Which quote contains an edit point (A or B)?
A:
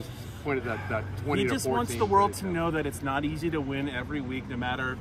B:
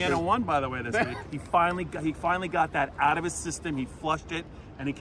B